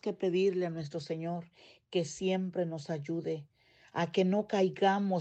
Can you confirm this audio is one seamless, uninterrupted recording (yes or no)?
yes